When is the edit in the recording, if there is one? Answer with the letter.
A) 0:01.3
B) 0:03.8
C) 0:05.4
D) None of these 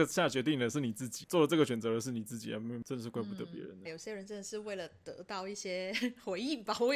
B